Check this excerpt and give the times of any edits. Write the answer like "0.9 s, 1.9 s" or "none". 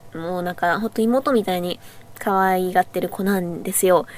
none